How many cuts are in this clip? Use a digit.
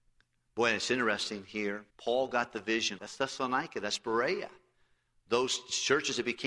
2